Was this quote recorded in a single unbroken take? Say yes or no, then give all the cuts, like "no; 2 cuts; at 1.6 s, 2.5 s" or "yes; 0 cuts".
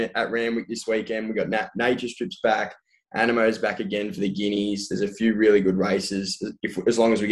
yes; 0 cuts